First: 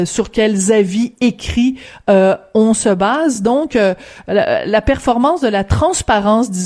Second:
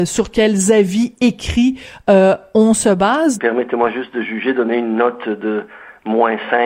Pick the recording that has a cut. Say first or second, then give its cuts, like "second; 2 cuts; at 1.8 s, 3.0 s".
second; 1 cut; at 3.4 s